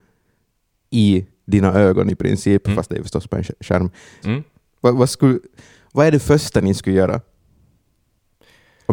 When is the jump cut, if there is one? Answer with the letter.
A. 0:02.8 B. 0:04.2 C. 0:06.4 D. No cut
B